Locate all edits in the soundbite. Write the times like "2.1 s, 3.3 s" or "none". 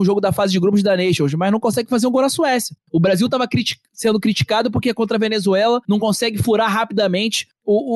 none